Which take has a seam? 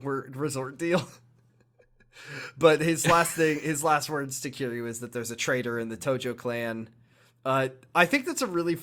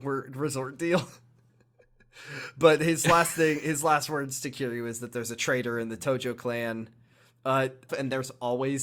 second; 1 cut; at 7.9 s

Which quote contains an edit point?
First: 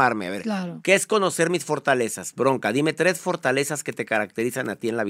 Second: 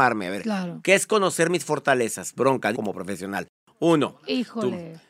second; 1 cut; at 2.7 s

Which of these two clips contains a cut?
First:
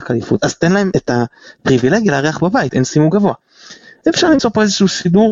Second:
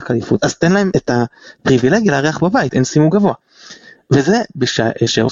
first; 1 cut; at 4.0 s

